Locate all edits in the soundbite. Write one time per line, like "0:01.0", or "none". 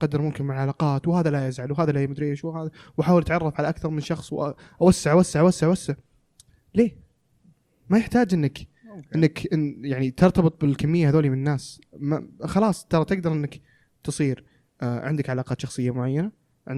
none